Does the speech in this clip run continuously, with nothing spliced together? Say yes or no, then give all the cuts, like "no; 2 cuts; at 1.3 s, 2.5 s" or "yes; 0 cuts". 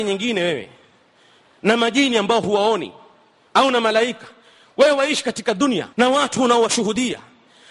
no; 1 cut; at 5.9 s